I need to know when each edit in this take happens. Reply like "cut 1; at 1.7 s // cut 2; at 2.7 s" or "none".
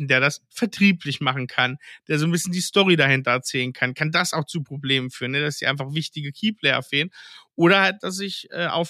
none